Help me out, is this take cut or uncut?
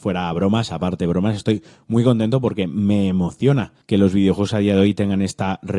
cut